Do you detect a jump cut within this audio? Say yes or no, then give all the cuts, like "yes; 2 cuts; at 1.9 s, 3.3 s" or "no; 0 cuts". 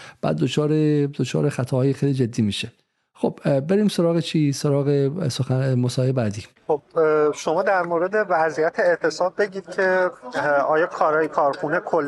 yes; 2 cuts; at 1.9 s, 6.6 s